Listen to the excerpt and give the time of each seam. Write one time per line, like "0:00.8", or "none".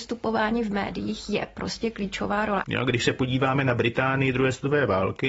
0:02.6

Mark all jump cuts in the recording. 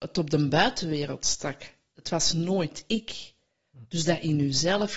none

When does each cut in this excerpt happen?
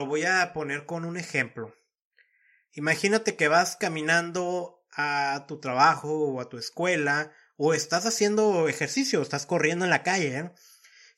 none

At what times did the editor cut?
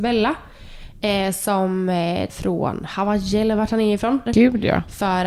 0:02.3
0:04.3

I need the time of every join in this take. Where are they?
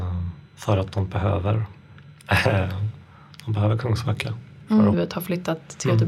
0:04.9

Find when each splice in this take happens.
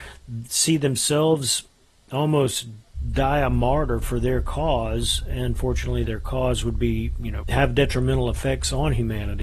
0:07.4

